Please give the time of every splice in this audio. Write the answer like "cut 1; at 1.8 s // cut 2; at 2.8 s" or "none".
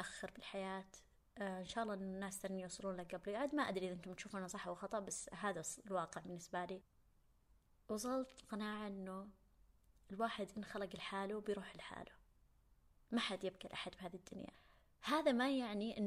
none